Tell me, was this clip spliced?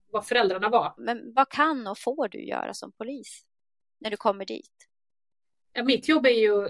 yes; 1 cut; at 1.0 s

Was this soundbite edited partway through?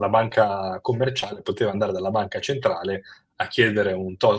no; 0 cuts

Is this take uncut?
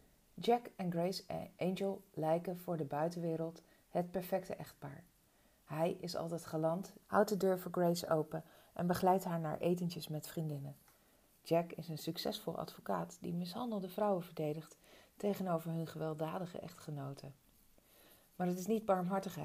no; 1 cut; at 7.0 s

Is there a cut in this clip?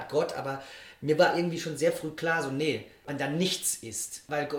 yes; 1 cut; at 3.1 s

